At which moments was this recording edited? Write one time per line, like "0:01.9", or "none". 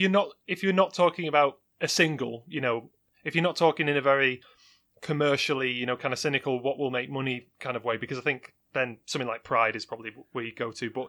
none